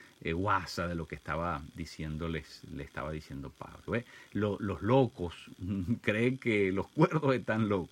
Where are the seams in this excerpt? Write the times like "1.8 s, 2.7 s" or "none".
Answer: 3.9 s